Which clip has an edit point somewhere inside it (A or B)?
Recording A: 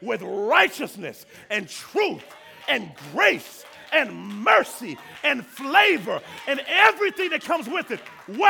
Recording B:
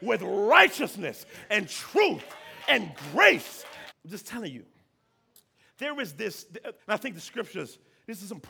B